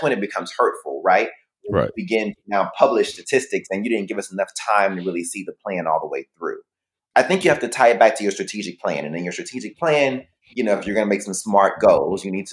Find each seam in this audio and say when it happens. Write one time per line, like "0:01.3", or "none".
none